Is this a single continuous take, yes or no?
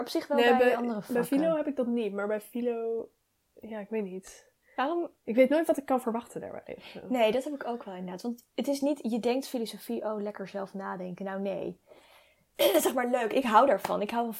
yes